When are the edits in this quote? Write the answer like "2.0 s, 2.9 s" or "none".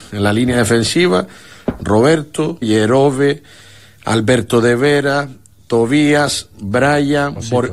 2.6 s